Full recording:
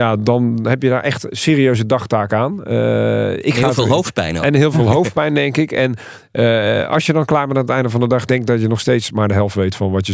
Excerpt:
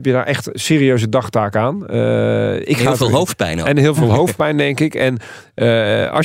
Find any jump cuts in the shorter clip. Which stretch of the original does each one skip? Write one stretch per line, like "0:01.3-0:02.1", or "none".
none